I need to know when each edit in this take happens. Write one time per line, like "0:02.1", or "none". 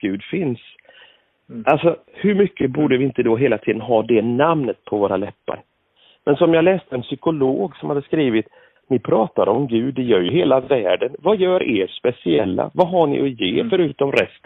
0:08.8